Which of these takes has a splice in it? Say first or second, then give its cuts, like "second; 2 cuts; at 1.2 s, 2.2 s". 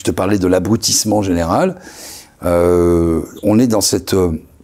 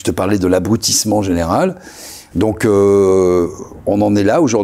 second; 1 cut; at 2.3 s